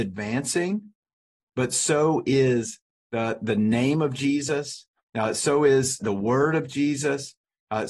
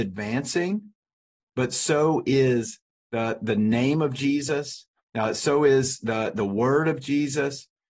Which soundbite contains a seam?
first; 1 cut; at 6.0 s

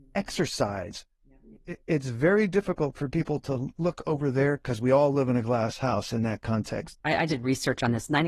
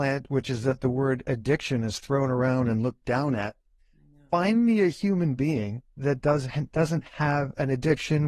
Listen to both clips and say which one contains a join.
first; 2 cuts; at 1.6 s, 7.0 s

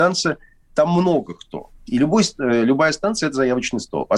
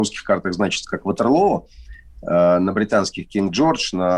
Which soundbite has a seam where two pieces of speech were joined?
first; 1 cut; at 1.8 s

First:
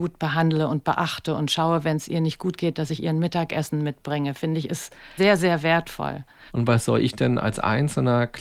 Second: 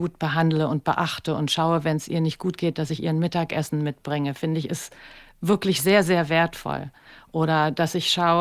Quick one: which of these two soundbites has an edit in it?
first; 2 cuts; at 5.2 s, 6.5 s

